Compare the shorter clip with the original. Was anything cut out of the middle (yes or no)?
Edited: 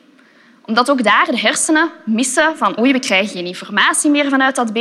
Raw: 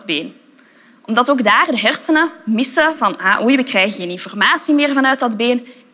yes